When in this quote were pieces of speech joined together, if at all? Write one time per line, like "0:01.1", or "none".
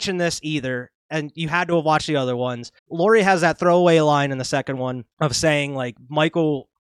0:02.8
0:05.1